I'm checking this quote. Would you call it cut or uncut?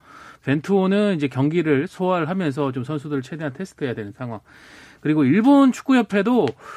uncut